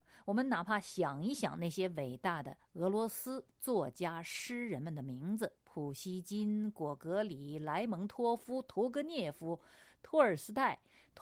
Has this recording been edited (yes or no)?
no